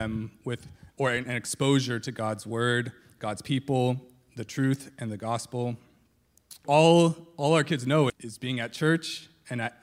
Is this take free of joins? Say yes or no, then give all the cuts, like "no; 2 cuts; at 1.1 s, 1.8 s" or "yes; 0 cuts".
no; 2 cuts; at 6.6 s, 8.1 s